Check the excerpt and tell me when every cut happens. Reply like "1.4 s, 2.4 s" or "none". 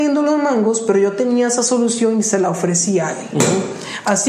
none

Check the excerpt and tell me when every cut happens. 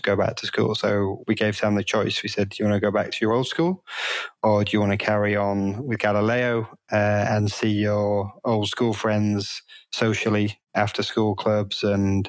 none

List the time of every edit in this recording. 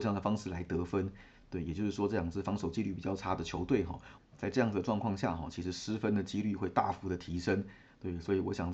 none

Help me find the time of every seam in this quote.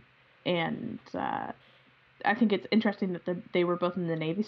none

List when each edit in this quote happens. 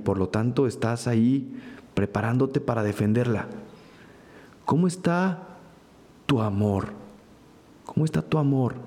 none

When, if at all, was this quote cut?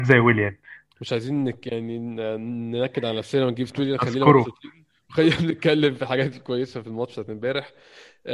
3.7 s

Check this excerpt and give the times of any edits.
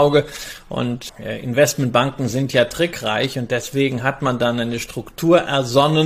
1.1 s

